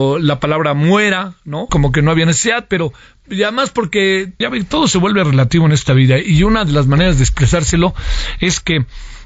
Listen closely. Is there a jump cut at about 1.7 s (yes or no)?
yes